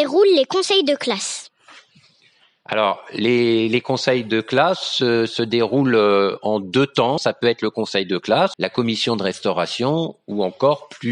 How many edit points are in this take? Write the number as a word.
two